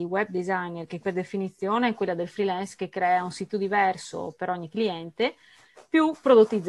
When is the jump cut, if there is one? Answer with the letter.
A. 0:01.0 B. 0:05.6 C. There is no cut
A